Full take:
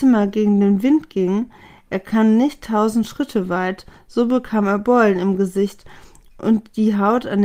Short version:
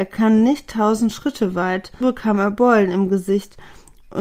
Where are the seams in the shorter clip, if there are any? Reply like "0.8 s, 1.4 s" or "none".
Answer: 2.0 s